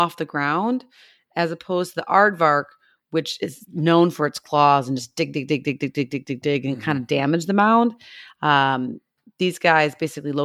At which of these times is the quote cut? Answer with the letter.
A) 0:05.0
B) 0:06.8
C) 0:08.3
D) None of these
D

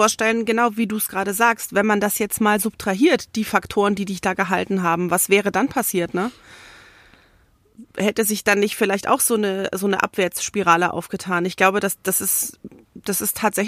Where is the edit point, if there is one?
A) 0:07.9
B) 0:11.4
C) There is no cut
C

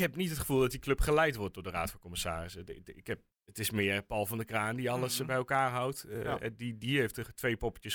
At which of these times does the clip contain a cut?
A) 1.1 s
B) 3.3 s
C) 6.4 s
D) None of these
B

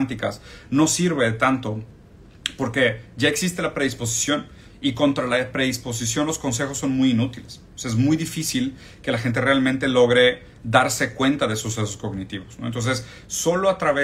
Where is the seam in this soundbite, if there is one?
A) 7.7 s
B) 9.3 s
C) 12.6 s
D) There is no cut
D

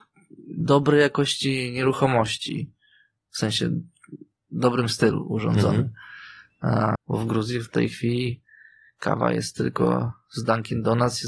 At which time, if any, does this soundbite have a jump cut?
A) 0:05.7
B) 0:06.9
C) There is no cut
B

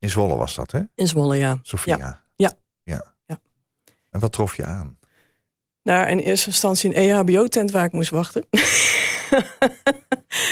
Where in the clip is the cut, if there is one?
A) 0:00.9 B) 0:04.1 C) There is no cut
B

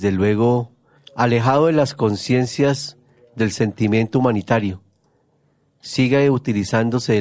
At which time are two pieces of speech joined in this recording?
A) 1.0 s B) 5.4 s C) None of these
A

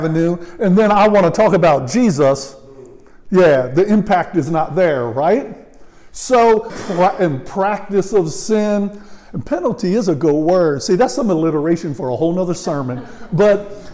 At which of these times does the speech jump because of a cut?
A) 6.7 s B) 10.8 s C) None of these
A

